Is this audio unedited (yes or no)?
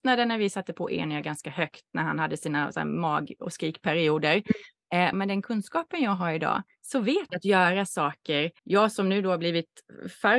no